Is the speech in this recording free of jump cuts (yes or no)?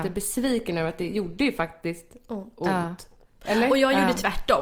yes